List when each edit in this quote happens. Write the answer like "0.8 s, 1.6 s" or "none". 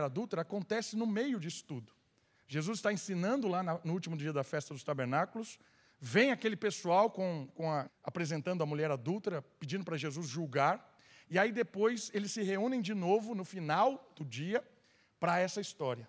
7.9 s